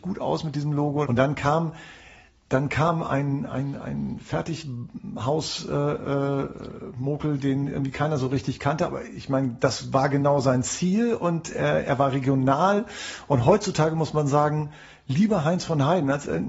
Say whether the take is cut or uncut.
cut